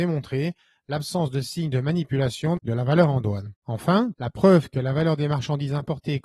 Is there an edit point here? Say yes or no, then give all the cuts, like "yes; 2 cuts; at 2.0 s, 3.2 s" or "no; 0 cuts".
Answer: yes; 1 cut; at 4.1 s